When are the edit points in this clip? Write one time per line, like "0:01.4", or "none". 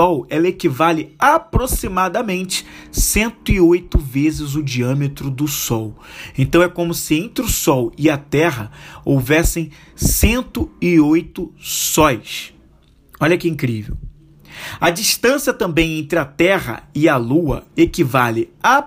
none

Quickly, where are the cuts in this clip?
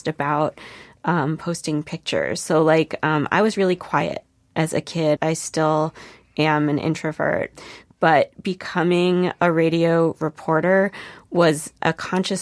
0:05.2

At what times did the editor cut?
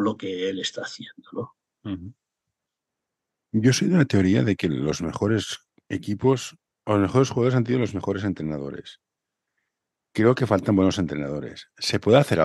none

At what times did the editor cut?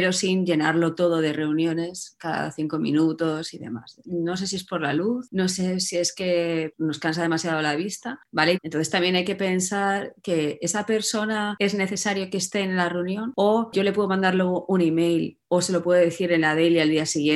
0:04.0
0:08.5

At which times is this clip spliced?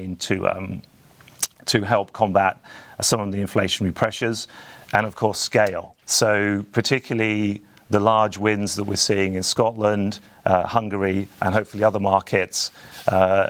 0:06.0

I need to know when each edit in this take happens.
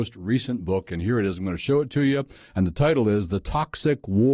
none

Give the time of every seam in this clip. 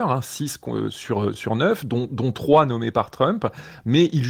none

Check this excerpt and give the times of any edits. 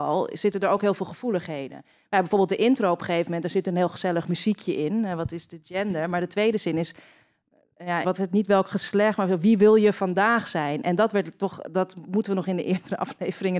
0:08.0

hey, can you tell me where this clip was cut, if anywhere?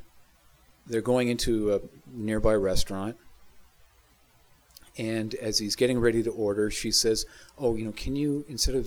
none

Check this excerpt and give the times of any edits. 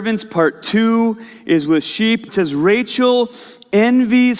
0:02.3

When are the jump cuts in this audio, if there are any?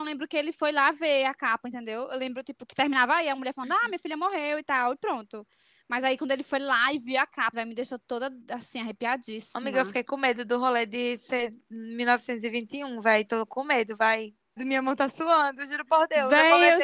0:07.5
0:14.6

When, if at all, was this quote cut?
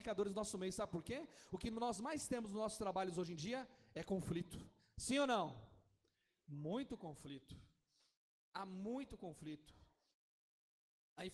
none

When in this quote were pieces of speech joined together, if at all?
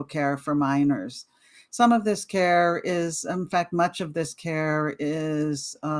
none

